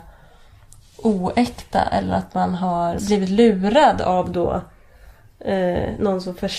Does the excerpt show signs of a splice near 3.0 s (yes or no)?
yes